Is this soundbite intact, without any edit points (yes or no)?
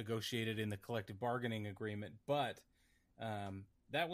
yes